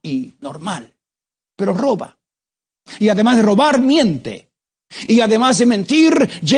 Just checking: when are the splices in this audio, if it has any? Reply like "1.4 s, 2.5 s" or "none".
none